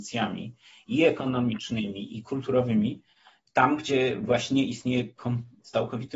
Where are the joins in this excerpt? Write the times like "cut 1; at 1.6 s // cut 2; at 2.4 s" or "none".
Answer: none